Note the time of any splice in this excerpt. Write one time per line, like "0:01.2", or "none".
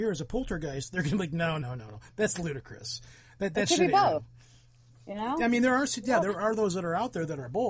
0:01.6